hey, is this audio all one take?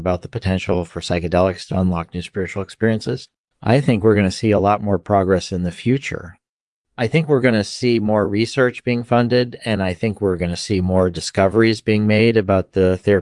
no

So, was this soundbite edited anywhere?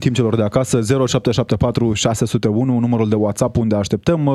yes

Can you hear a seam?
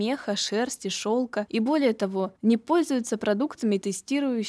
no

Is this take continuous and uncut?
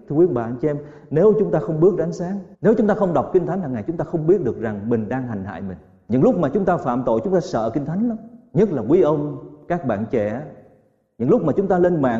no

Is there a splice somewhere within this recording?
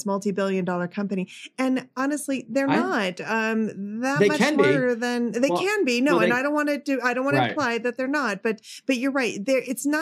no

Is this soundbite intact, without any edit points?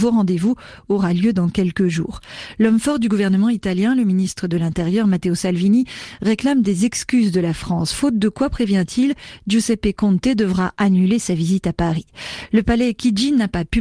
yes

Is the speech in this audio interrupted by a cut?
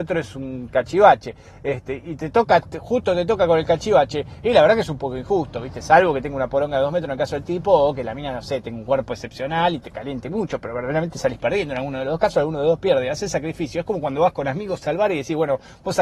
no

